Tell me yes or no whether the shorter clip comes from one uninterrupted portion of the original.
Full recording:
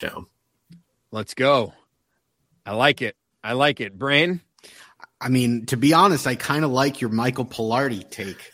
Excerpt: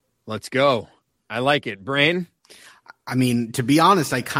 no